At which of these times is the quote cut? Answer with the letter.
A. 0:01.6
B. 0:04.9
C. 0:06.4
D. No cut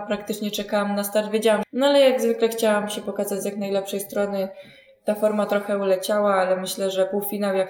A